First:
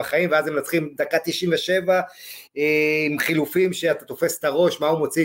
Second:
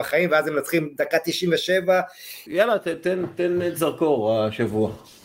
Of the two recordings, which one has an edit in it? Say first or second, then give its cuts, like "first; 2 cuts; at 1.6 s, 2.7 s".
second; 1 cut; at 2.5 s